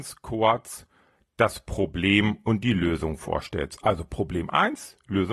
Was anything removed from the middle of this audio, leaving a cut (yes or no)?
no